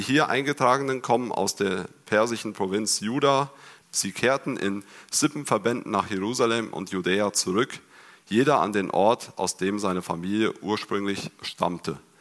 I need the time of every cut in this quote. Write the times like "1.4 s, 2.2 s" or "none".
3.8 s